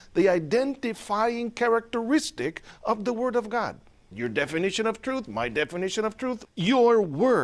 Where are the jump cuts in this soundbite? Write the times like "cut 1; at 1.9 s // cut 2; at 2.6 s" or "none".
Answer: cut 1; at 4.1 s // cut 2; at 6.4 s